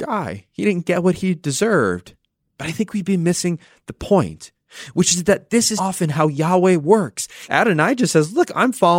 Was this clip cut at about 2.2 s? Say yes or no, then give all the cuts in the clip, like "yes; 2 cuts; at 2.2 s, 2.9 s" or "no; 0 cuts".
no; 2 cuts; at 5.8 s, 7.5 s